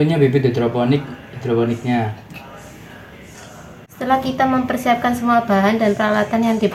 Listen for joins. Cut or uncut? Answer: cut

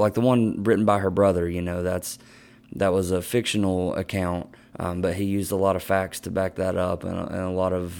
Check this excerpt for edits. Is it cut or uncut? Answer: uncut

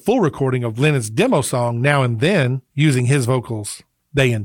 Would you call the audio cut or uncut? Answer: uncut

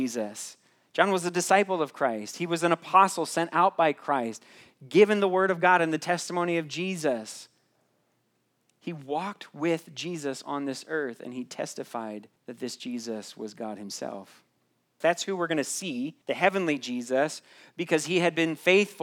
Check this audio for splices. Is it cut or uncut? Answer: cut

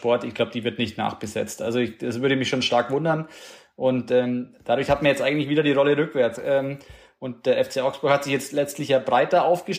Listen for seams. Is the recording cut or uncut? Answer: cut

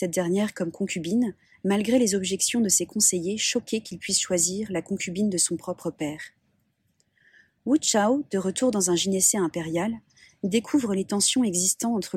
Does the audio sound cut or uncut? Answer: uncut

